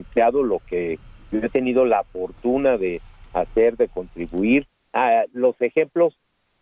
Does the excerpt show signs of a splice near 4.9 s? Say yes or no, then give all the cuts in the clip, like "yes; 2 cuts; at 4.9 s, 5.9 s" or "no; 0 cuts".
yes; 1 cut; at 4.9 s